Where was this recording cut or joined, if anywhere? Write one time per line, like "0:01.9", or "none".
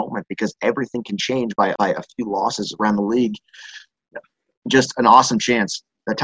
0:01.8